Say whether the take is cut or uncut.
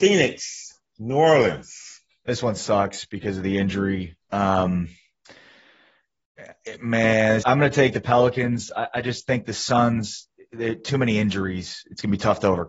cut